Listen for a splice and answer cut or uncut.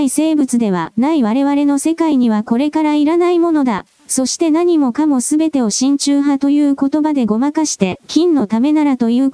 cut